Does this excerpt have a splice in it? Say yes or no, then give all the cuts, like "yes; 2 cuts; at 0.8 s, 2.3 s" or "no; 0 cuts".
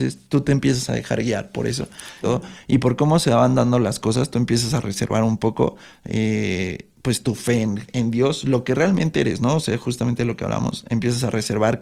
yes; 1 cut; at 2.2 s